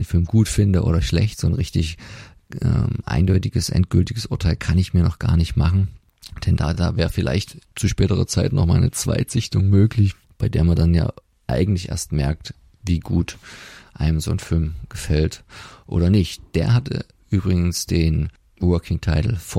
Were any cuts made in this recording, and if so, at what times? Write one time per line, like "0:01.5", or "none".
none